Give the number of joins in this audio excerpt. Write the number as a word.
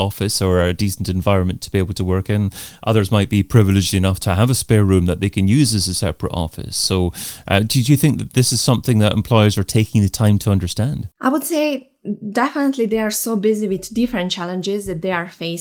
one